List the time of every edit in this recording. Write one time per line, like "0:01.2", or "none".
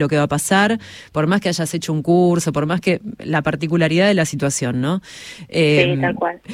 none